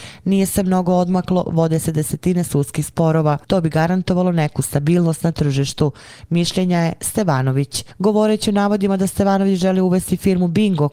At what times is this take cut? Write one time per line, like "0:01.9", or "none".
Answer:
0:03.4